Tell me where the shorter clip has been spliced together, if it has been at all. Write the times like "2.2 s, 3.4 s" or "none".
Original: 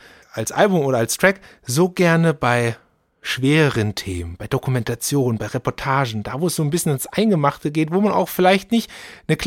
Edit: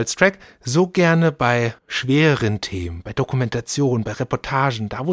1.8 s